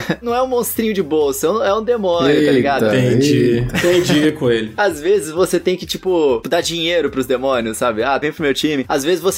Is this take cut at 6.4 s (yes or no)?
yes